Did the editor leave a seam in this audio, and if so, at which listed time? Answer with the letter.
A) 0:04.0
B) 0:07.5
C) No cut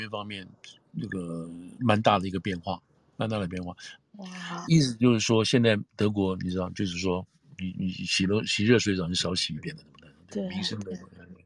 A